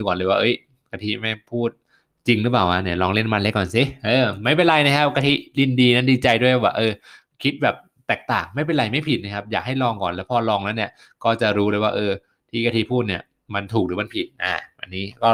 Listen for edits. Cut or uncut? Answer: uncut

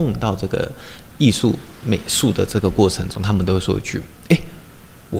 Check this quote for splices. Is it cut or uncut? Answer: uncut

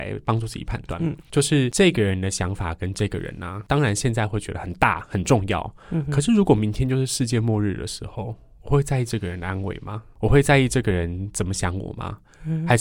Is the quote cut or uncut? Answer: uncut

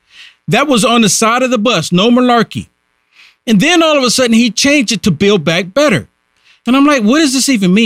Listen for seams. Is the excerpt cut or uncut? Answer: uncut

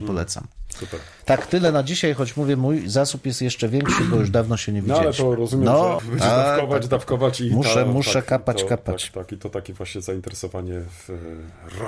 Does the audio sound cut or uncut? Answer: cut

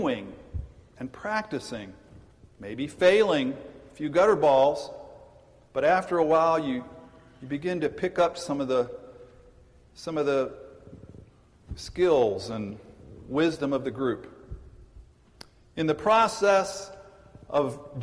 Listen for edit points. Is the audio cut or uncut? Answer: uncut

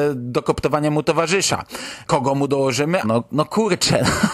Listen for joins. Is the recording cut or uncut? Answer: cut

